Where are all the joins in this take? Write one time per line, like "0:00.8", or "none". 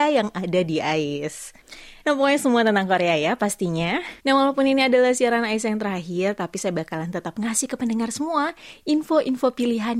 0:02.0
0:04.2